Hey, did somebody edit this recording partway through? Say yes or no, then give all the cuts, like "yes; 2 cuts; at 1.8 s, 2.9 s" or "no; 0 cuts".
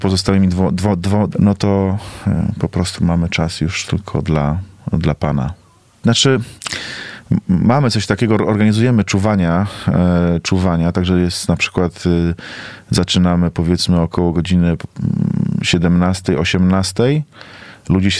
yes; 2 cuts; at 1.3 s, 6.0 s